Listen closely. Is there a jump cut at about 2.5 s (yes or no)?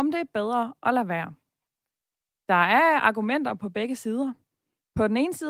no